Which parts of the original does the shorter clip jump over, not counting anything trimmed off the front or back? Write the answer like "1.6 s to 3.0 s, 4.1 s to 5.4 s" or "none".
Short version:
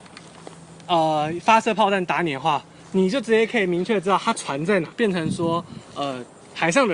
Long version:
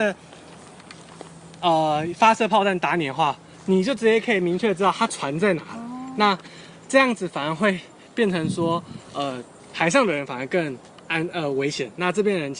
5.7 s to 8.1 s